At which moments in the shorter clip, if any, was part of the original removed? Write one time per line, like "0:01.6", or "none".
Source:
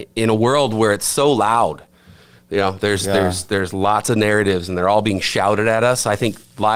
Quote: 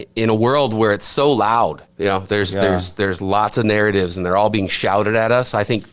0:01.9

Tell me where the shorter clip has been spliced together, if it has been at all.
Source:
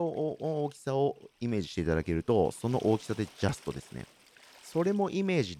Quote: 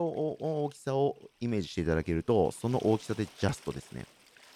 none

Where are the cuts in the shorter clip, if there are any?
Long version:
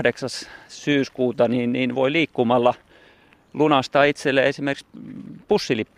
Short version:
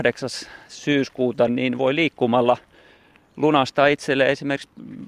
0:01.5

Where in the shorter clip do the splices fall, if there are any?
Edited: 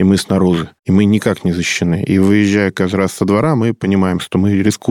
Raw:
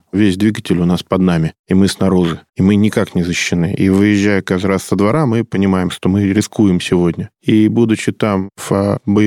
none

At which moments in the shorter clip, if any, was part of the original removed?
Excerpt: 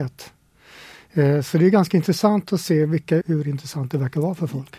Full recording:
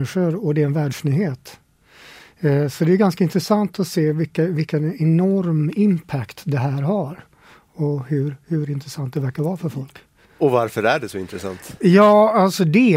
0:03.2

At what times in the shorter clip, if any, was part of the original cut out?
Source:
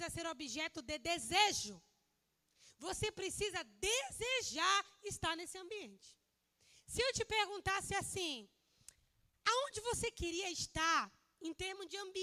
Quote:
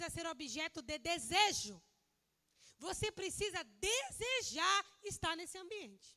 none

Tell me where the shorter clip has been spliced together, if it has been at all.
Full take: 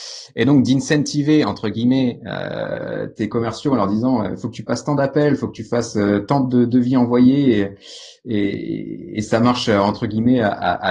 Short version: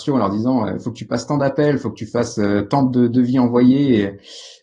none

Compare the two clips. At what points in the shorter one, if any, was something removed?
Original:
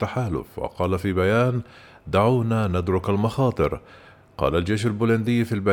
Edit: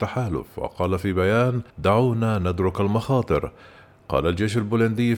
0:01.7

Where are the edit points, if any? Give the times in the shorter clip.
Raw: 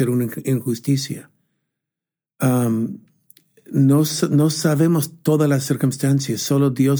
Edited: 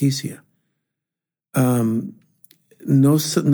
none

